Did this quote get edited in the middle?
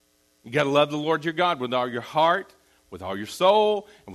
no; 0 cuts

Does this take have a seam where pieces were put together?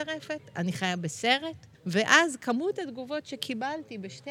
yes; 1 cut; at 1.7 s

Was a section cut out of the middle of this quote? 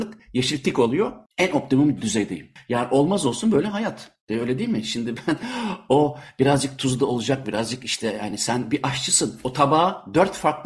no; 0 cuts

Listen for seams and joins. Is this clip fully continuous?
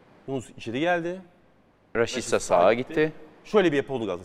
yes; 0 cuts

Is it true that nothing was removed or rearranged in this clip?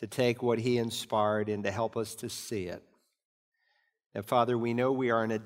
yes; 0 cuts

